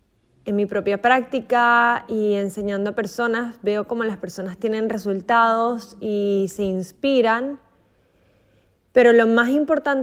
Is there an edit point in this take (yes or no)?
no